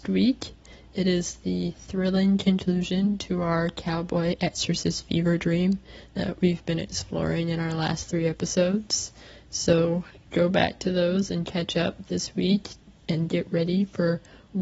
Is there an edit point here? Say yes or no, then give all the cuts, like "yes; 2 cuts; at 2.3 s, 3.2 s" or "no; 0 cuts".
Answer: no; 0 cuts